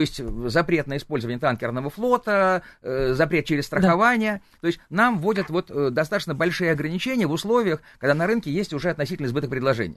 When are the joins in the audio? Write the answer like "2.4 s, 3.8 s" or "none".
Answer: none

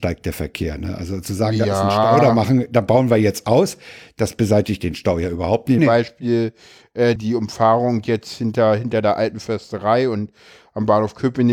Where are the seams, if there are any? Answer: 5.8 s, 7.2 s

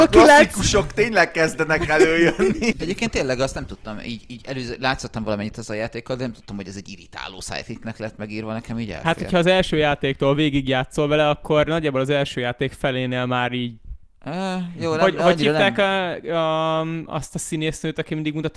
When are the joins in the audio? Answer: 2.7 s

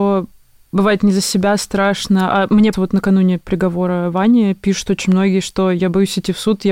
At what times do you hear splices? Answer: 2.7 s

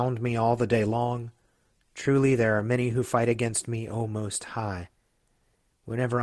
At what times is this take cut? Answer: none

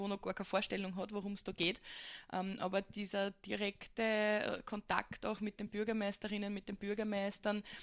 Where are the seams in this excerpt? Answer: none

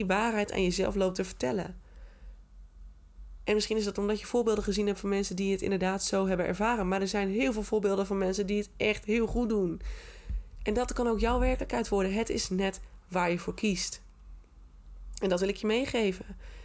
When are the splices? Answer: none

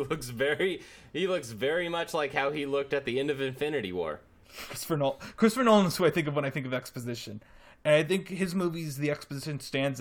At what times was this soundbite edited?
4.4 s

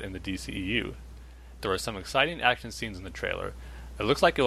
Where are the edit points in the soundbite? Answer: 1.6 s

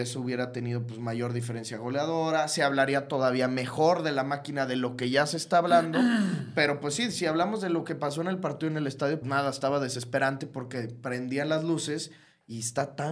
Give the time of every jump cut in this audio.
9.2 s

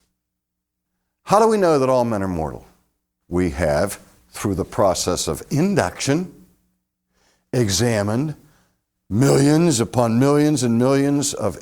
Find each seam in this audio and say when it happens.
3.2 s

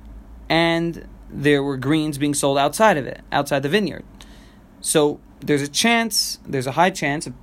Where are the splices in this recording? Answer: none

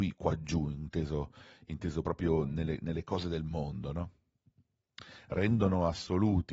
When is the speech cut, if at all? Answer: none

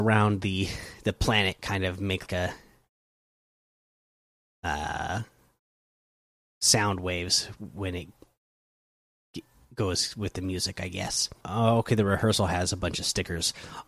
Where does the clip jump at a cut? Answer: 2.3 s, 11.4 s

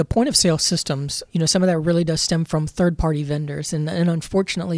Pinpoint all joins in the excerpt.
1.3 s

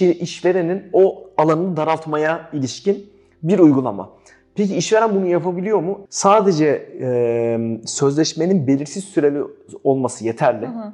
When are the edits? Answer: 6.1 s

